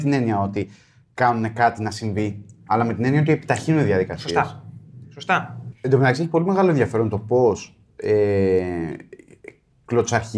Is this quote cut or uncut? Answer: cut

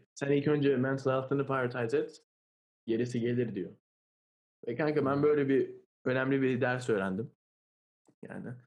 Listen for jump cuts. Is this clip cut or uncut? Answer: uncut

